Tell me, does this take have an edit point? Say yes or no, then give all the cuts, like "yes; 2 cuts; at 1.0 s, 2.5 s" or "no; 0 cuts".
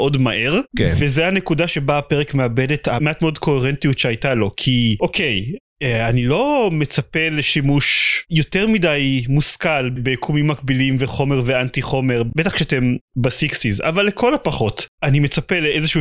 no; 0 cuts